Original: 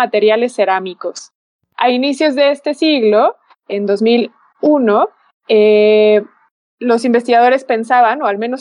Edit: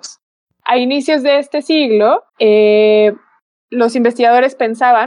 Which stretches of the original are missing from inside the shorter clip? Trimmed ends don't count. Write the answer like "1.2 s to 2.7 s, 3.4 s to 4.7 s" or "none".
3.4 s to 5.4 s